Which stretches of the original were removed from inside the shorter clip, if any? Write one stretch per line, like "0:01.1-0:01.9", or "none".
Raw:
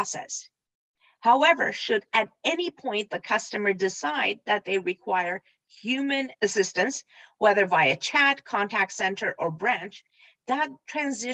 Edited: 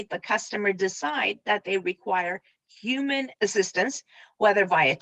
none